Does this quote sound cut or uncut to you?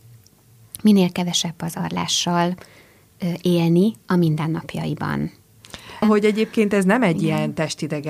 cut